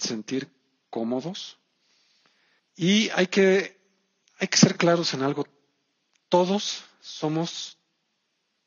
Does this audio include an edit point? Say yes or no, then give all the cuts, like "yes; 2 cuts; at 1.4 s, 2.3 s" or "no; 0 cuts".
yes; 1 cut; at 2.6 s